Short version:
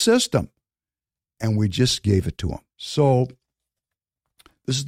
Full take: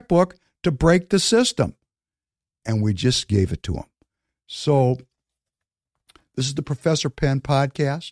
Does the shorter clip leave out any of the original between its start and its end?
yes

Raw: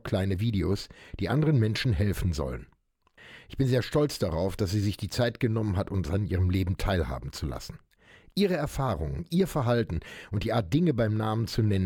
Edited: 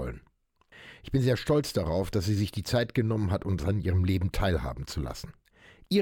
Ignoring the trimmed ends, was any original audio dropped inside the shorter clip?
no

